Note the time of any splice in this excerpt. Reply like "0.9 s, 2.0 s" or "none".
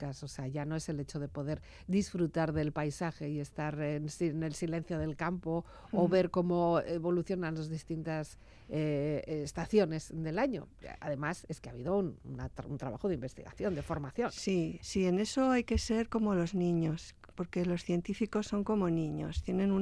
none